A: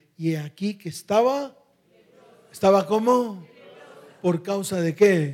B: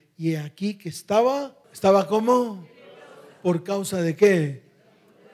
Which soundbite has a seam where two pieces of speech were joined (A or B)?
B